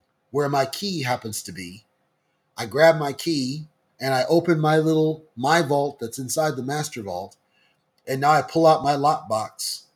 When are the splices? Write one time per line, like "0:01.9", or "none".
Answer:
0:03.9